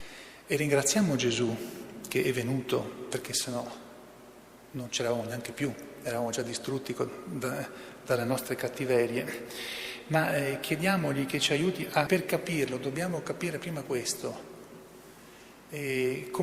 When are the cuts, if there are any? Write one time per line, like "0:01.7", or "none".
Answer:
0:12.1